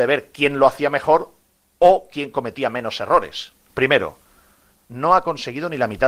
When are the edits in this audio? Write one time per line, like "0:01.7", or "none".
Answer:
0:03.7